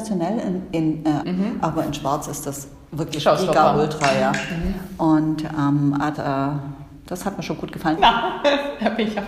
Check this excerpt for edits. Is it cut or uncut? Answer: cut